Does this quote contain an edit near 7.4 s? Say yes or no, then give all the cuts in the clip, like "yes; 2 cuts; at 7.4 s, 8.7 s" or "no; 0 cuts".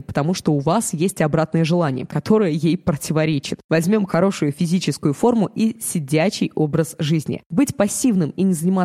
no; 1 cut; at 4.1 s